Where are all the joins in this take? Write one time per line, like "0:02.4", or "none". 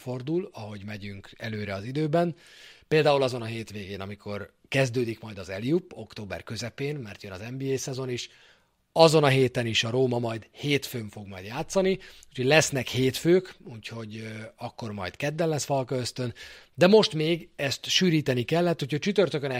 none